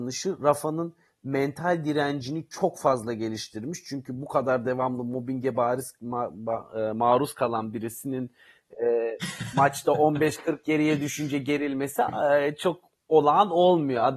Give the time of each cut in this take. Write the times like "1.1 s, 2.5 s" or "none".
none